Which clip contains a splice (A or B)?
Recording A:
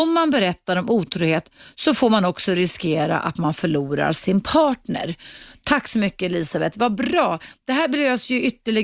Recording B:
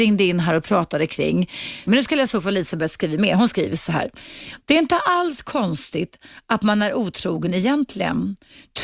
B